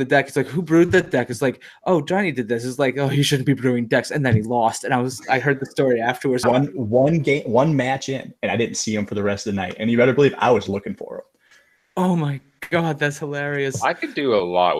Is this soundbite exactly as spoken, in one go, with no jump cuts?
no; 1 cut; at 6.4 s

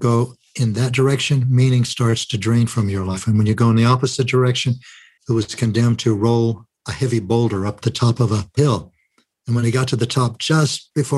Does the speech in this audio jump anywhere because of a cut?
yes; 1 cut; at 5.2 s

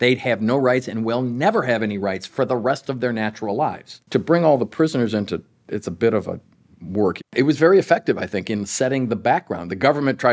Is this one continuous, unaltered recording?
no; 2 cuts; at 4.0 s, 7.2 s

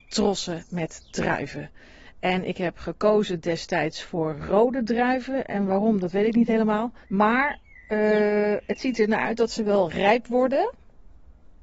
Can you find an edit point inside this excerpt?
yes; 1 cut; at 7.0 s

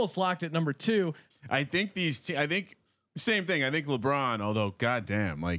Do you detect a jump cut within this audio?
yes; 1 cut; at 1.3 s

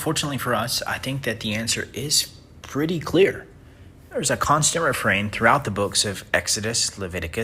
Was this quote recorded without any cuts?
yes; 0 cuts

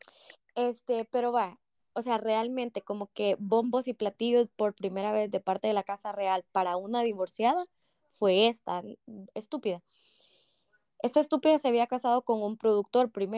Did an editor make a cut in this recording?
no; 0 cuts

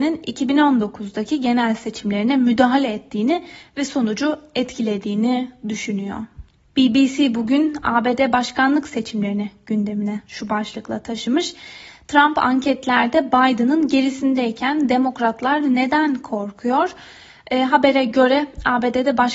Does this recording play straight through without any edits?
no; 1 cut; at 6.7 s

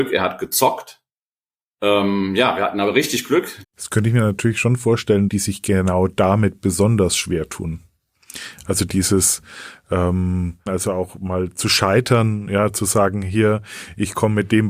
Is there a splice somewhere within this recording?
yes; 3 cuts; at 3.6 s, 5.3 s, 10.7 s

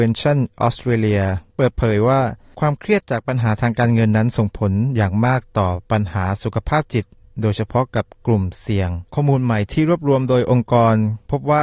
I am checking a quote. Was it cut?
yes; 2 cuts; at 1.5 s, 9.1 s

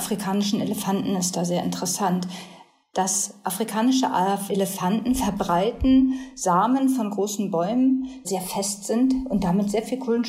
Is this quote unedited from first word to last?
no; 2 cuts; at 4.5 s, 8.2 s

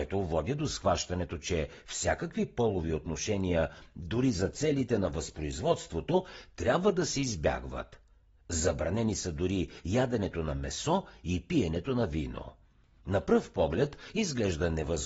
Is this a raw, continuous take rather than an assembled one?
yes; 0 cuts

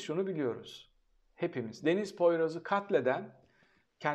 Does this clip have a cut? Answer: no; 0 cuts

